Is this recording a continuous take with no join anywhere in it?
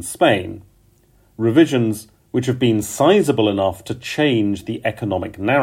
yes; 0 cuts

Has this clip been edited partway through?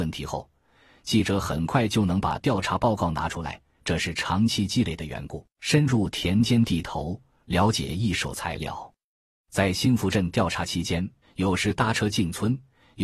yes; 2 cuts; at 5.5 s, 11.2 s

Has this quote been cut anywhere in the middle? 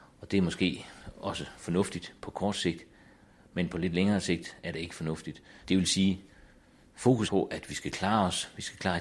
yes; 2 cuts; at 5.6 s, 7.2 s

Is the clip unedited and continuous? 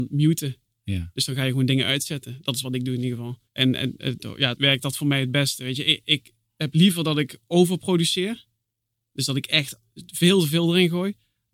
no; 2 cuts; at 3.5 s, 4.6 s

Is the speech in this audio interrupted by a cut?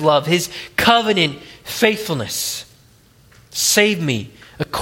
no; 0 cuts

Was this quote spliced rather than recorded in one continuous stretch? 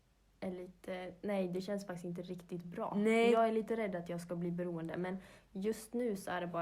no; 0 cuts

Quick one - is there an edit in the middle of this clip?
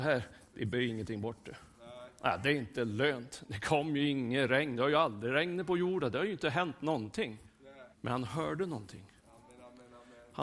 yes; 1 cut; at 7.9 s

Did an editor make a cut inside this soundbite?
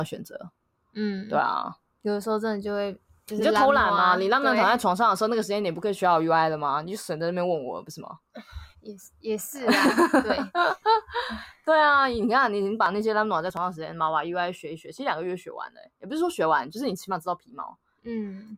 yes; 1 cut; at 8.7 s

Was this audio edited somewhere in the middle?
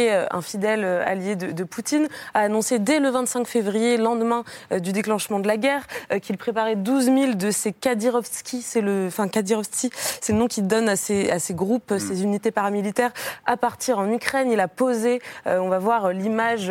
no; 0 cuts

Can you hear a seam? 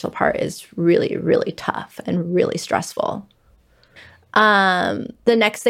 no; 0 cuts

